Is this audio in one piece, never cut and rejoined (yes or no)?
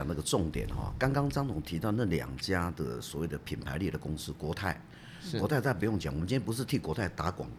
yes